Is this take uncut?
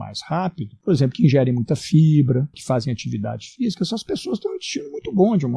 no; 1 cut; at 2.5 s

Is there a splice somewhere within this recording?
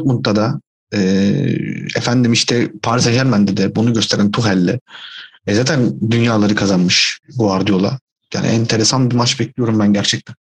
no; 0 cuts

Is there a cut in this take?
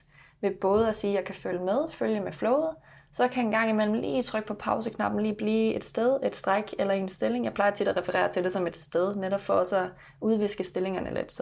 no; 0 cuts

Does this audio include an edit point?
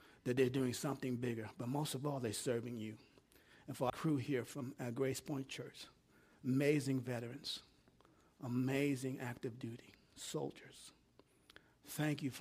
yes; 1 cut; at 3.9 s

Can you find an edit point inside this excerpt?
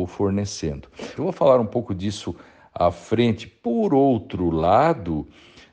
yes; 1 cut; at 1.2 s

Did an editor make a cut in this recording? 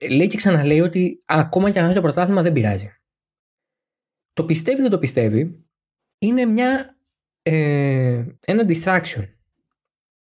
yes; 2 cuts; at 6.1 s, 8.4 s

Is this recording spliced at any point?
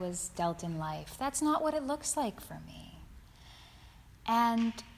no; 0 cuts

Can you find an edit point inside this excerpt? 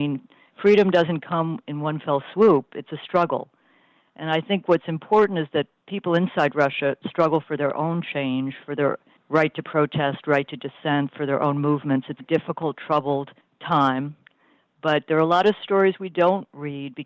yes; 1 cut; at 12.2 s

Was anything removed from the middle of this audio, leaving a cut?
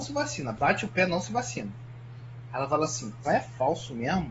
yes; 1 cut; at 3.2 s

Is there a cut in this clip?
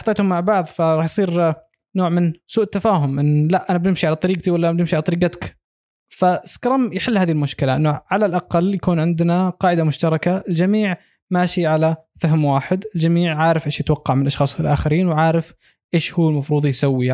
no; 0 cuts

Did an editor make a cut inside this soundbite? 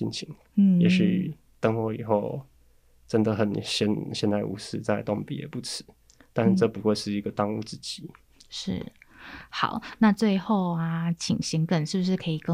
no; 0 cuts

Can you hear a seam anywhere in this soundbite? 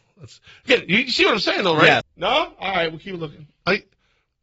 yes; 1 cut; at 2.0 s

